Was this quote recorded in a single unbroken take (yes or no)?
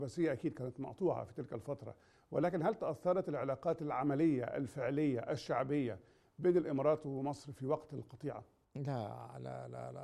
yes